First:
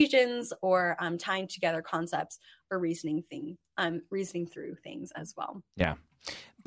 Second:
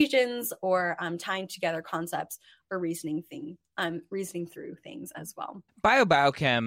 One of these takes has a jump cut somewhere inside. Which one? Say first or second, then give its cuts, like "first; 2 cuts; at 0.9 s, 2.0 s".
second; 1 cut; at 5.7 s